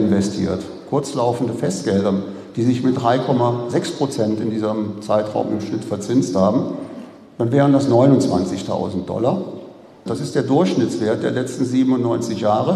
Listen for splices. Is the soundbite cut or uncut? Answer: cut